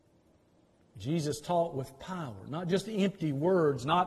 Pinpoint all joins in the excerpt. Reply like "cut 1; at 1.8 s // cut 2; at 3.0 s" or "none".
none